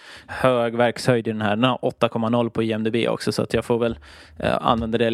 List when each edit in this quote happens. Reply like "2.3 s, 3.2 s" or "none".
none